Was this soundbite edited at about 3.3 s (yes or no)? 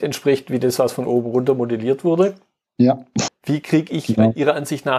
yes